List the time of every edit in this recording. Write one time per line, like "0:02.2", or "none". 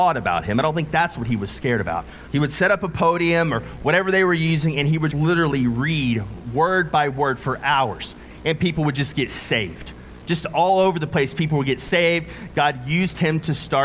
0:02.3
0:05.1